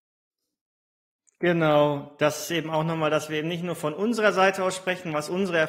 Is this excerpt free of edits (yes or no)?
yes